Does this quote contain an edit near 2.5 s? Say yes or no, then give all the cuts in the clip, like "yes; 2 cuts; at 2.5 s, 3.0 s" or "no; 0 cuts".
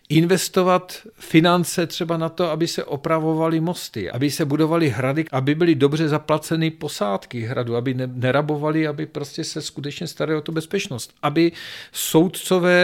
no; 2 cuts; at 4.1 s, 5.2 s